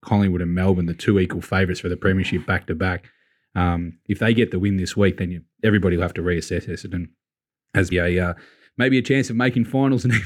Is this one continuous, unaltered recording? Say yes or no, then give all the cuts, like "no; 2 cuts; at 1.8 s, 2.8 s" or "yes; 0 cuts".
no; 1 cut; at 7.9 s